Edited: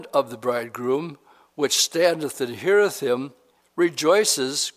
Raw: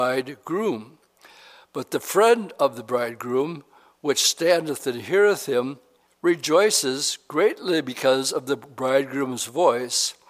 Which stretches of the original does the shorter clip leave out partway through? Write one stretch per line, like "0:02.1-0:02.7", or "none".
none